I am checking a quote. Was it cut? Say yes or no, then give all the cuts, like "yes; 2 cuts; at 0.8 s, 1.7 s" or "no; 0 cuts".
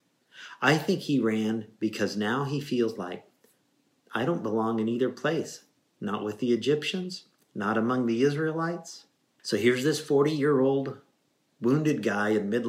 yes; 1 cut; at 9.4 s